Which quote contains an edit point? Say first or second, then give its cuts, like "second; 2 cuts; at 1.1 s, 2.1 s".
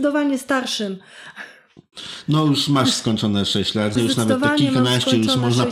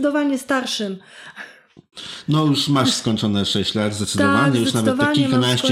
first; 1 cut; at 4.0 s